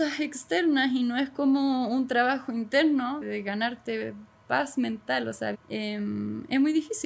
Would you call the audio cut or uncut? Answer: cut